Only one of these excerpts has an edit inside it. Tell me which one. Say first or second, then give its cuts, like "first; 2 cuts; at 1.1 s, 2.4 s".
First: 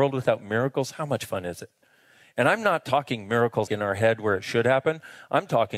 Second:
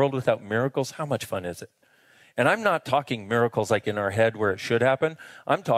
first; 1 cut; at 3.7 s